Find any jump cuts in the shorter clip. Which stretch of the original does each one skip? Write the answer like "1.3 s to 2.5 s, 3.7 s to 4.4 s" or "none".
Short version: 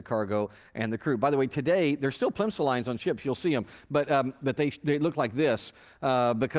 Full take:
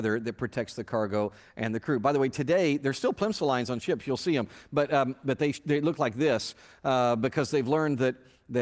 none